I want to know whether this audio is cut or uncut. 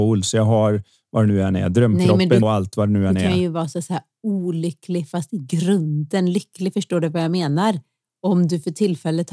cut